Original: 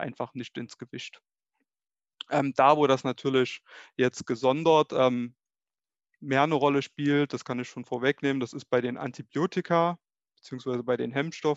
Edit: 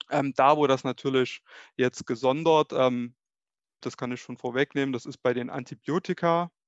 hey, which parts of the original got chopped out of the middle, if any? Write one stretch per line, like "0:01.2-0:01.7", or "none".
0:06.0-0:07.3